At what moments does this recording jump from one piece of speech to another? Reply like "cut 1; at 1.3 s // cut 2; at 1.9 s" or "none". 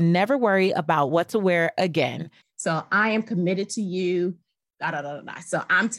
cut 1; at 2.4 s